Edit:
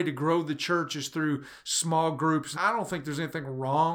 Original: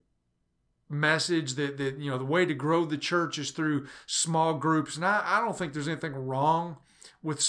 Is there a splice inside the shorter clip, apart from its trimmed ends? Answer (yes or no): yes